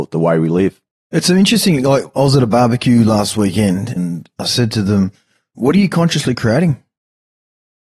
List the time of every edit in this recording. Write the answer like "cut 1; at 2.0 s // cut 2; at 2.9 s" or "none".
cut 1; at 4.0 s